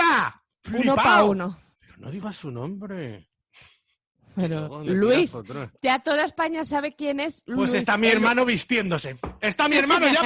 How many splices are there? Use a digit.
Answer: 1